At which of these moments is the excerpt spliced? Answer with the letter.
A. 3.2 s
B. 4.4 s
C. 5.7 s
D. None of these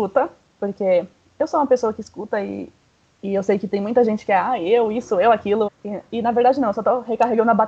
C